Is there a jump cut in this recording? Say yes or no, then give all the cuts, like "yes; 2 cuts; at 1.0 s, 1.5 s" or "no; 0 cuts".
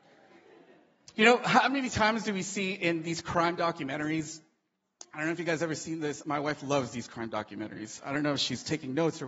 no; 0 cuts